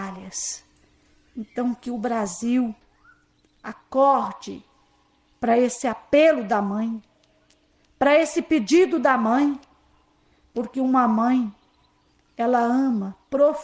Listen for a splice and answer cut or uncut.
uncut